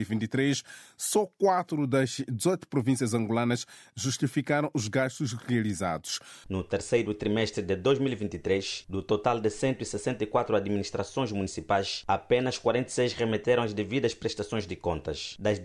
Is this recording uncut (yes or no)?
no